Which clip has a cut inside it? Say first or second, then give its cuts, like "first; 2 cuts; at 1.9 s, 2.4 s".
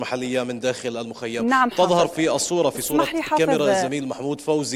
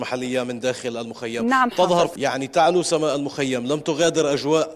second; 1 cut; at 2.2 s